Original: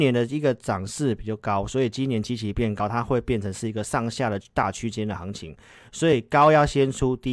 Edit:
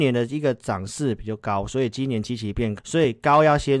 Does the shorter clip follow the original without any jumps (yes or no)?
no